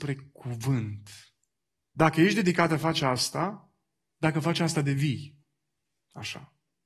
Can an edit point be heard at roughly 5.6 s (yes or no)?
no